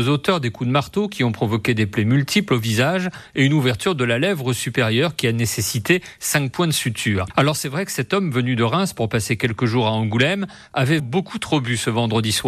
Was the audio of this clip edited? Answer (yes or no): yes